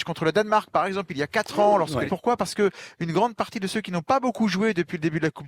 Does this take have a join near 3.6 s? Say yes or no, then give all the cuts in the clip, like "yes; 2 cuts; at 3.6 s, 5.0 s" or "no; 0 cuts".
no; 1 cut; at 2.1 s